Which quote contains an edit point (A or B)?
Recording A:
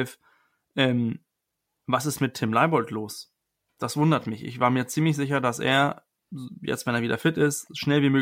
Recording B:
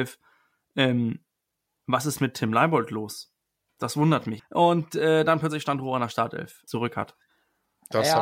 B